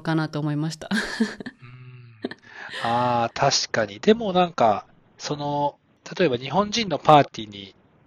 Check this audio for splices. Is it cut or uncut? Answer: uncut